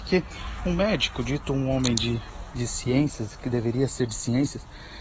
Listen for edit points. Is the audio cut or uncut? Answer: uncut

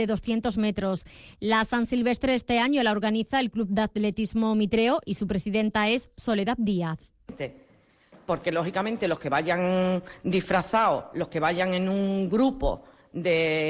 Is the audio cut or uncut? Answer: uncut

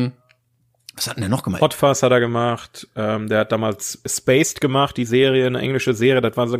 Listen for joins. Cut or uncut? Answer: cut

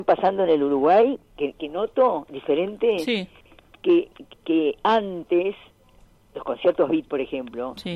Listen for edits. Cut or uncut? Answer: uncut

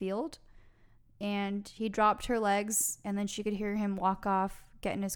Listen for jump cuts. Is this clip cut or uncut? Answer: uncut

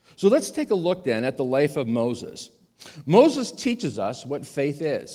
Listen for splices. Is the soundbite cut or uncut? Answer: uncut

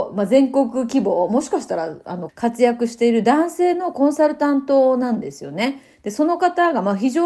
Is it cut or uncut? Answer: cut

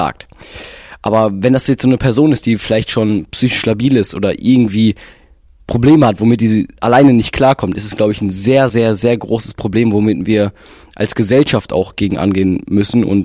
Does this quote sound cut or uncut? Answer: uncut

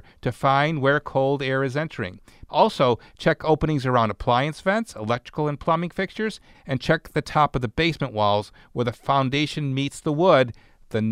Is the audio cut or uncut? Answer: cut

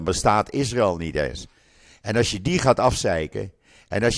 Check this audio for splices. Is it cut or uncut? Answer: uncut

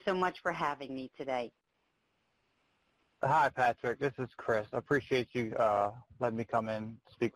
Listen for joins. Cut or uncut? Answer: uncut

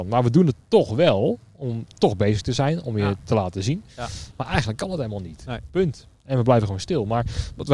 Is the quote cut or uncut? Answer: cut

